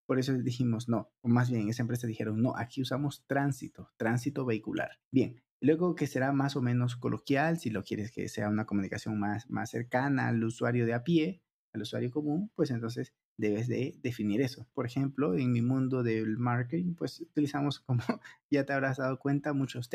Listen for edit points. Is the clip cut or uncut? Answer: cut